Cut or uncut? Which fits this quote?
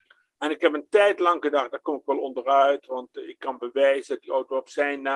cut